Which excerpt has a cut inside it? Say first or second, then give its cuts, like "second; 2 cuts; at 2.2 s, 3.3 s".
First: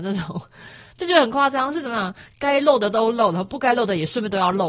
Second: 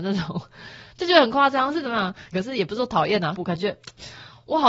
second; 2 cuts; at 2.3 s, 3.3 s